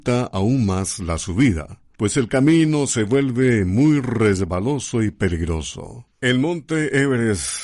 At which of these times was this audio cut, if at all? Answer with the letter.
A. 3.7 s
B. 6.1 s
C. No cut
B